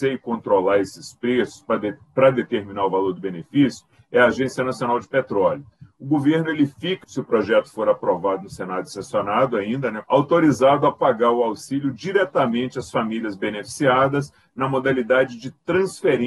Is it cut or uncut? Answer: cut